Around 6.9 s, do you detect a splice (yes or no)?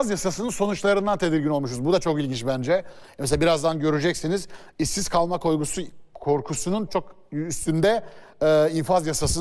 yes